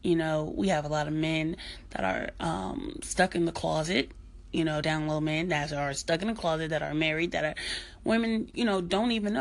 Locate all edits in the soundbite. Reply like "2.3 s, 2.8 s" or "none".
none